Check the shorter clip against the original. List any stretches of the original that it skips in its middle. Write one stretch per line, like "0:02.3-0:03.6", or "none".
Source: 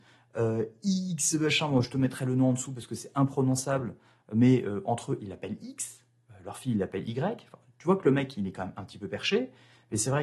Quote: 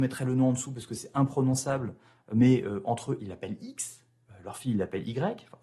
none